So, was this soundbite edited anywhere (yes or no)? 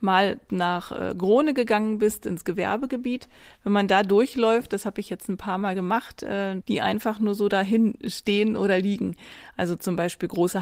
yes